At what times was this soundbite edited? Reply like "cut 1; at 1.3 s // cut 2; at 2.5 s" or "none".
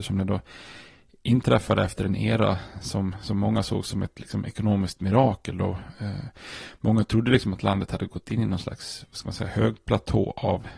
none